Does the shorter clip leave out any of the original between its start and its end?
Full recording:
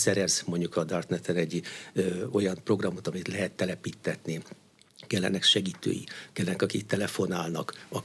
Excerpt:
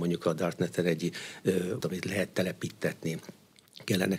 yes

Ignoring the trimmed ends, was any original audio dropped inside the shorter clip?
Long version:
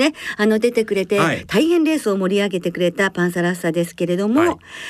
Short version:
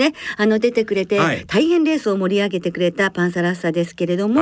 no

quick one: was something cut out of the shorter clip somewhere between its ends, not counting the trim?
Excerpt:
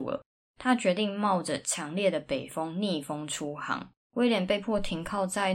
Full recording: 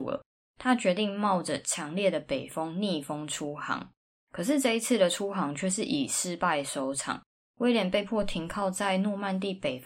yes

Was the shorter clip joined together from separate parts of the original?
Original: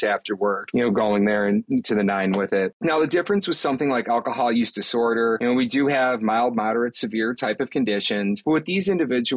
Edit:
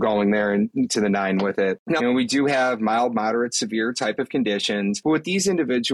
yes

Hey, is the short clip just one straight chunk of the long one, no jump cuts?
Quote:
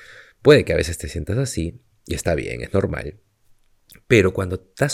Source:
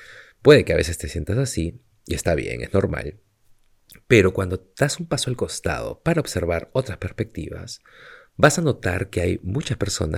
yes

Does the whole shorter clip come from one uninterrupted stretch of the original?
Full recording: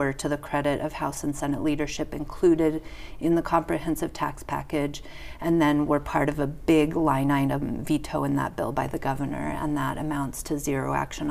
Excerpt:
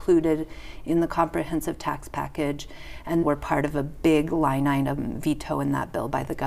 no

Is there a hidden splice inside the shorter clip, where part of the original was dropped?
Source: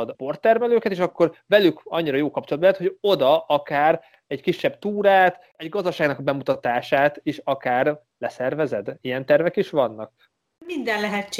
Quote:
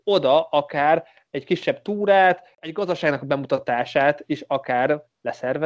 no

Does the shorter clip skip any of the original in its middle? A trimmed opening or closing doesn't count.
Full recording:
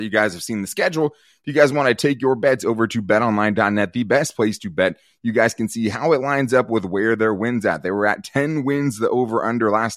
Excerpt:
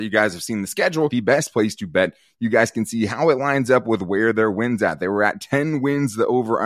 yes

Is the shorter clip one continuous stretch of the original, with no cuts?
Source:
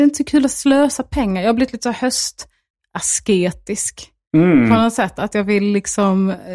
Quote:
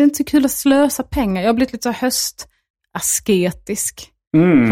yes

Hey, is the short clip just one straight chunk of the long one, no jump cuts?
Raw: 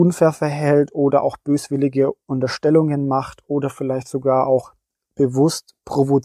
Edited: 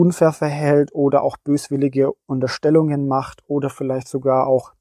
yes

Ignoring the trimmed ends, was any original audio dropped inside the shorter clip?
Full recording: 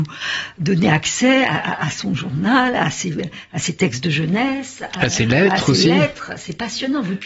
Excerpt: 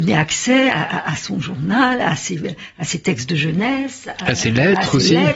no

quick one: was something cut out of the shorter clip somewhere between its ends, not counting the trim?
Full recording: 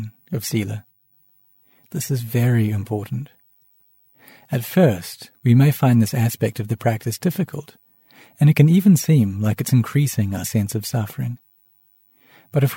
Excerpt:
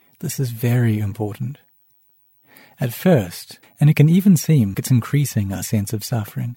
yes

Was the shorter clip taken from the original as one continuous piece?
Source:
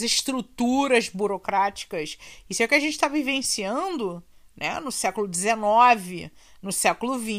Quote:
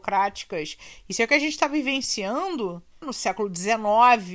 no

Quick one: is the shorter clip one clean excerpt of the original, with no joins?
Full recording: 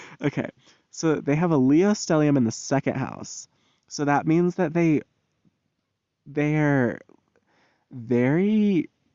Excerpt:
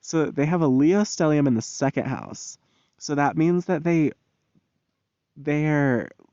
yes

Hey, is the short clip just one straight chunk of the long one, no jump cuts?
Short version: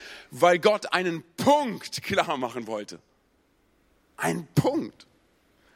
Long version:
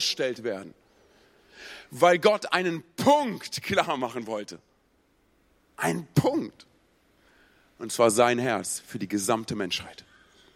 yes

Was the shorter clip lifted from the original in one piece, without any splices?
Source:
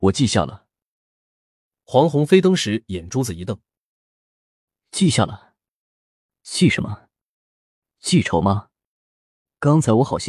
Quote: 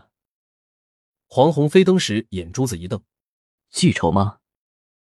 no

